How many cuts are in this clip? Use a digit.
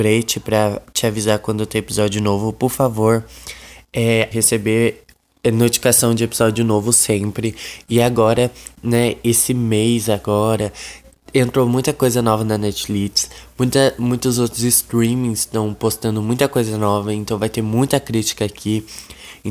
1